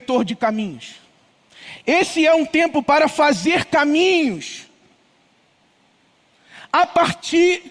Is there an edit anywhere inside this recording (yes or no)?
no